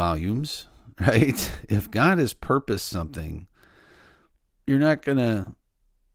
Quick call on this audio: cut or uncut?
uncut